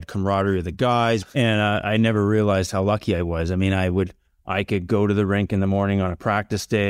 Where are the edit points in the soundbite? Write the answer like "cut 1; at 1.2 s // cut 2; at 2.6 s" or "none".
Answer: cut 1; at 1.2 s